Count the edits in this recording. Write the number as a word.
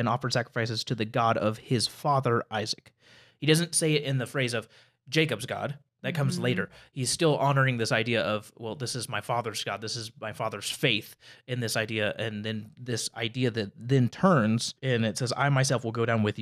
one